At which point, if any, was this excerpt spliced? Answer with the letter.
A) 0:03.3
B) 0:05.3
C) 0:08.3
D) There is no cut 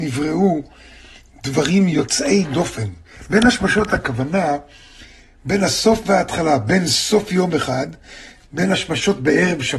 D